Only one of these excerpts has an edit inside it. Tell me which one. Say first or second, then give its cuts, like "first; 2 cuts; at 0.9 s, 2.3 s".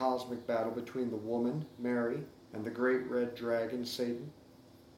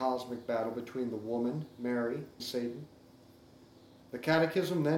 second; 1 cut; at 2.4 s